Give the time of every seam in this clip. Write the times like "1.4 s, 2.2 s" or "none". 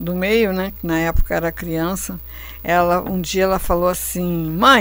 none